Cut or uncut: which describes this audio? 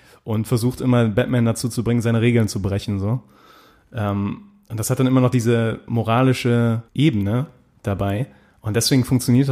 cut